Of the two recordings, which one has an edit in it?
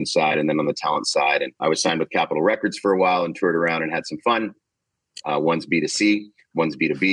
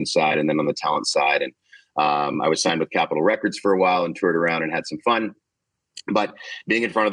first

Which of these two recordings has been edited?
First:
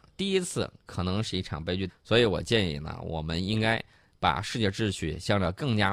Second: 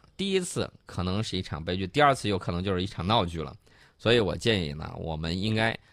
first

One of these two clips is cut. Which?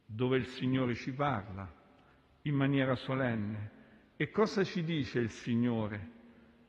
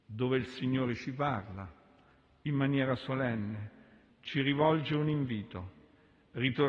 second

